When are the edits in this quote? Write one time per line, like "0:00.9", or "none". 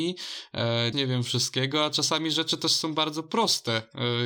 0:00.9